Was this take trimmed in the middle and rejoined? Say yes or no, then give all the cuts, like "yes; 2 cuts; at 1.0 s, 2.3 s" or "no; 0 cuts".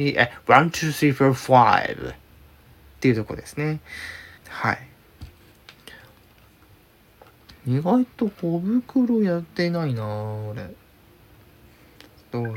yes; 1 cut; at 4.4 s